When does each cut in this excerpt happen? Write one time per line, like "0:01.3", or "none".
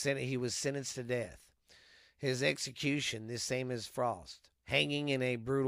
0:04.5